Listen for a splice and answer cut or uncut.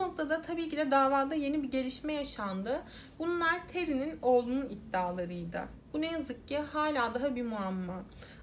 cut